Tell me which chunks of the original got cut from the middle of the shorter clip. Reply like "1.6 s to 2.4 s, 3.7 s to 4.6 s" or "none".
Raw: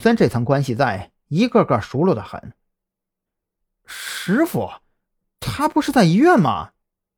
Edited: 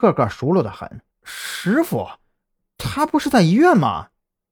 2.6 s to 3.7 s